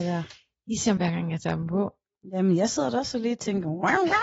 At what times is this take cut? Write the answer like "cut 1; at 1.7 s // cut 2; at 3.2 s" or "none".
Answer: cut 1; at 1.0 s